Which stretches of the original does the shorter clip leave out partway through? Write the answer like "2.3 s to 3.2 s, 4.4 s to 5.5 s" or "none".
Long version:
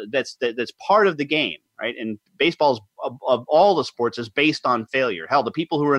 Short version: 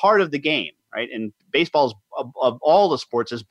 none